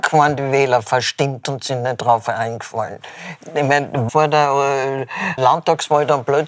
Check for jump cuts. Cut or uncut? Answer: cut